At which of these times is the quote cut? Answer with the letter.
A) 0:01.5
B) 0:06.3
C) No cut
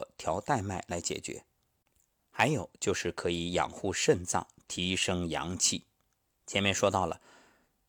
B